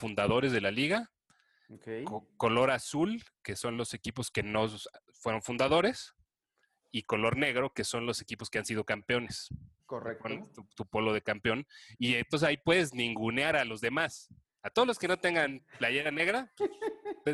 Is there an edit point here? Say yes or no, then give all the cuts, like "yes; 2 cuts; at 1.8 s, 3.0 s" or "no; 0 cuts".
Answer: yes; 1 cut; at 9.8 s